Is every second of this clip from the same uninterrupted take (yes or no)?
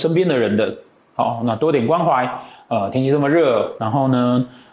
yes